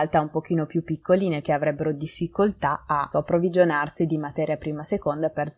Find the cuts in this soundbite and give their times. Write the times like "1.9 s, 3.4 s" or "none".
1.4 s, 3.1 s